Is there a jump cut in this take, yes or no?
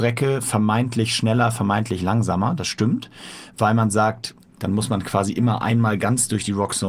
yes